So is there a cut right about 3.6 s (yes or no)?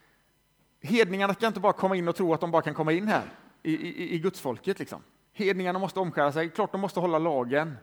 no